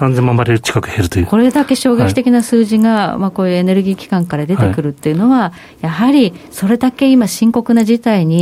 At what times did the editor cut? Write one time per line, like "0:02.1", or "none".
none